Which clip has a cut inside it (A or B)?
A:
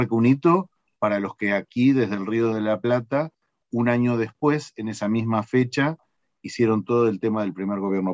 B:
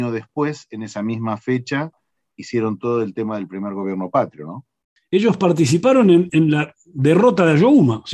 B